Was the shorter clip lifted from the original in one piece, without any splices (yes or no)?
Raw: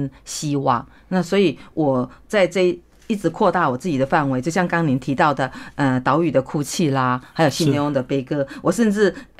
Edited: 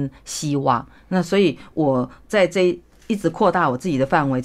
yes